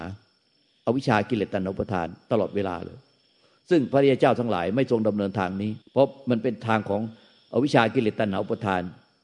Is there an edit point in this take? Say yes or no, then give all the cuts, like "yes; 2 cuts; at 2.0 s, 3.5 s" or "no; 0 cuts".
yes; 1 cut; at 5.8 s